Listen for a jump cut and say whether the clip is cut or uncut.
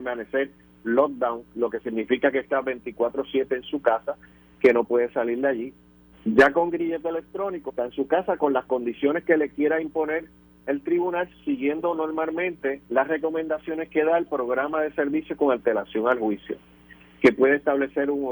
cut